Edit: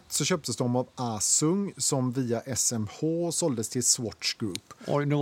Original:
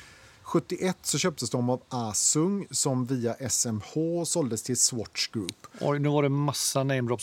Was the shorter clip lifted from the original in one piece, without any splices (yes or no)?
yes